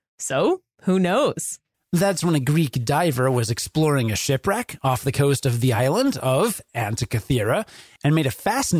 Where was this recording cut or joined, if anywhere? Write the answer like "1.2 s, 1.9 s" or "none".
1.7 s